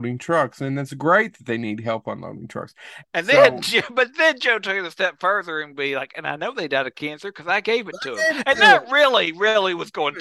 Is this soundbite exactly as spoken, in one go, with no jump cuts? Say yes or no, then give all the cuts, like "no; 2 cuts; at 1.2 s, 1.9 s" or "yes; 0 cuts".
no; 1 cut; at 3.0 s